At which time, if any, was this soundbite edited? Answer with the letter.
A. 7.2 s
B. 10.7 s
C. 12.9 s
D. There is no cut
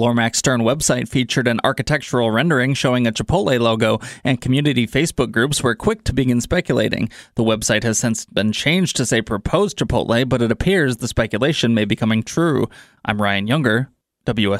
D